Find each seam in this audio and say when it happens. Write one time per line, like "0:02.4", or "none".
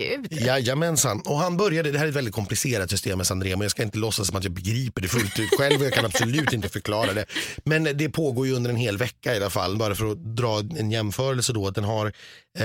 0:09.7